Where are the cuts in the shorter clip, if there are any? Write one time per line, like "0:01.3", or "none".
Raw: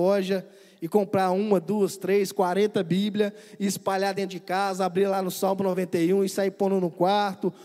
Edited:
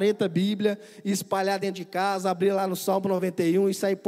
none